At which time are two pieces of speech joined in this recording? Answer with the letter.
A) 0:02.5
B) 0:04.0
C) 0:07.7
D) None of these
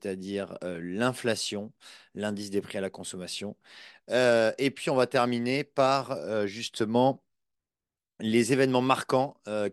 B